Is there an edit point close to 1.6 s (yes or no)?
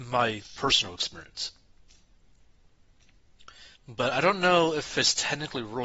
no